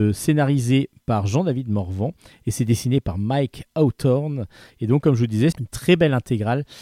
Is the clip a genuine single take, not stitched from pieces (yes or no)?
no